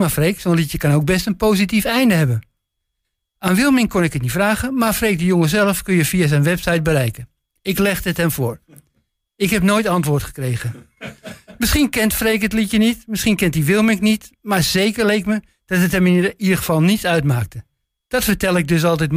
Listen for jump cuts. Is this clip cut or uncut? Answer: uncut